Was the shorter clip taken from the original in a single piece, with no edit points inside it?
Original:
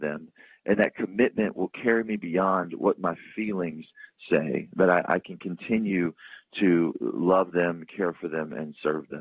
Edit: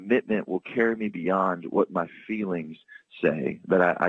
yes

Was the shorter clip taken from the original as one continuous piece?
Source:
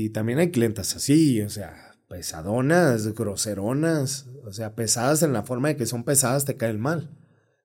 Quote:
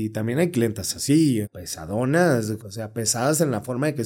no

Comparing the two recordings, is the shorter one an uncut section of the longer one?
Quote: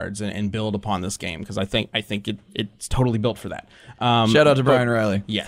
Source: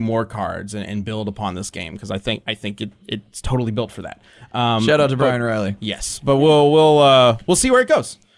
yes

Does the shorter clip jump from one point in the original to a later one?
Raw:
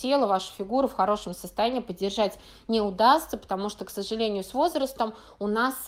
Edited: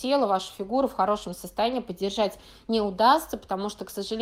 no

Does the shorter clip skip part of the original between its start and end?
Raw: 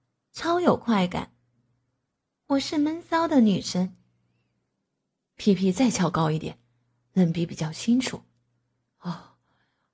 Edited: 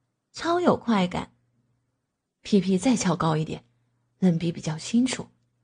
yes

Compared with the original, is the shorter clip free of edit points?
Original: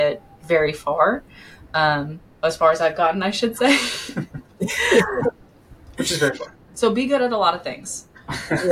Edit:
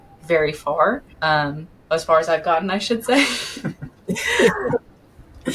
no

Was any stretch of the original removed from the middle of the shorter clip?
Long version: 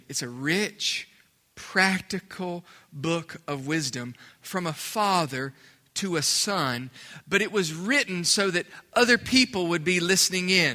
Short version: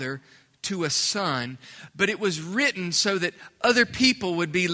no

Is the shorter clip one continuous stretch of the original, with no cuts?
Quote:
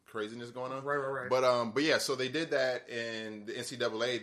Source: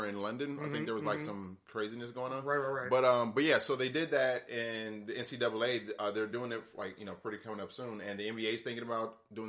yes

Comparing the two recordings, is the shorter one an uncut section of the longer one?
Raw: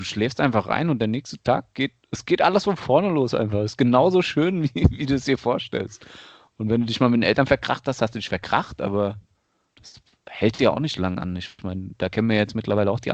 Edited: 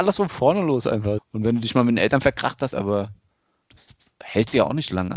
no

